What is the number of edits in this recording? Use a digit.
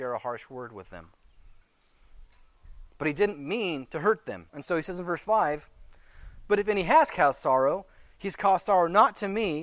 1